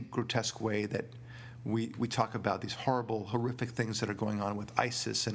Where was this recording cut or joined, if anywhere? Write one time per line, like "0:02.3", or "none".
none